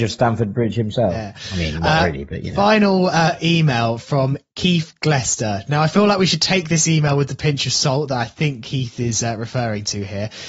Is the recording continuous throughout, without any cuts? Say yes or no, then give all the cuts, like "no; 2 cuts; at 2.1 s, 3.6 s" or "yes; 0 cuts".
yes; 0 cuts